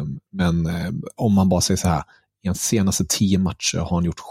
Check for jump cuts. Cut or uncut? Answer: uncut